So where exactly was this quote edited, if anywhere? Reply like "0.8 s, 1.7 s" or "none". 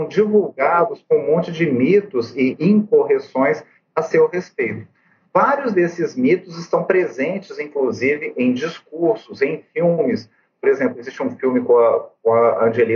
none